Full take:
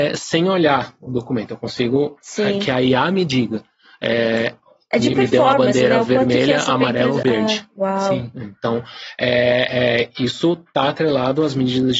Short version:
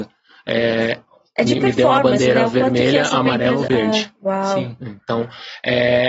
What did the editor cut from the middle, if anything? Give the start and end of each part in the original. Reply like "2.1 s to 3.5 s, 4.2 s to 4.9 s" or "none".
none

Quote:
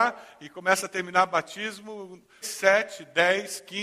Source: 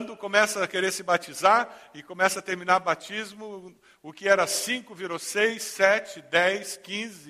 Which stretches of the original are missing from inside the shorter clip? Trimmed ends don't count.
3.9 s to 5.6 s

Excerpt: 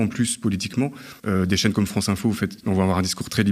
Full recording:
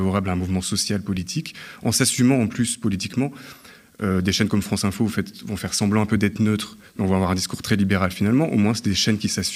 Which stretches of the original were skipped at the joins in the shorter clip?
3.6 s to 3.9 s, 5.3 s to 6.9 s

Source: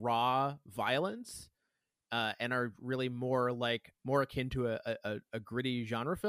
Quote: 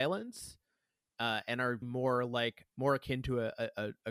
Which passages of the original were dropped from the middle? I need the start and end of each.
2.7 s to 3.1 s

